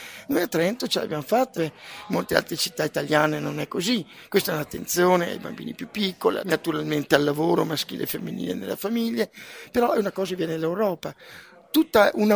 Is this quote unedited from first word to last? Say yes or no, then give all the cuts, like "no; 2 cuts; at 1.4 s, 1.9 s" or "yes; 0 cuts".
no; 2 cuts; at 1.6 s, 6.4 s